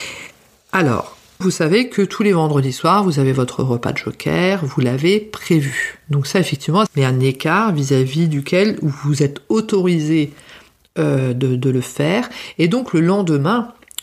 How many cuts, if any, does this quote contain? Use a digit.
2